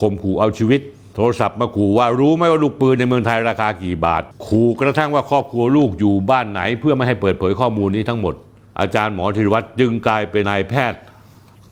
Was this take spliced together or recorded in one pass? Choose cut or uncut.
cut